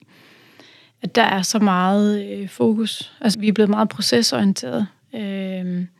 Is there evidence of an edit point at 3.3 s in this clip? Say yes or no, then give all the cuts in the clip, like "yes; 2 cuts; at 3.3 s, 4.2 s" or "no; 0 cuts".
yes; 1 cut; at 3.3 s